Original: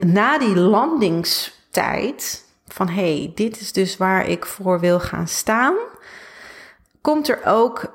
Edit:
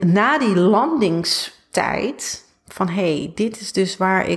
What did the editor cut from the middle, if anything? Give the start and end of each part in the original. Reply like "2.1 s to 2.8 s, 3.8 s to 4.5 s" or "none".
none